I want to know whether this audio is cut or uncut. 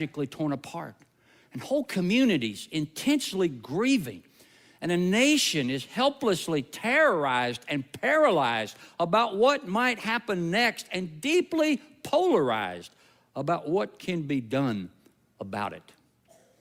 uncut